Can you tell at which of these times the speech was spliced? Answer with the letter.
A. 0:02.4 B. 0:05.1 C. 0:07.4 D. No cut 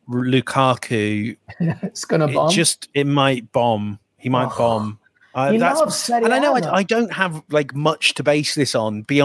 D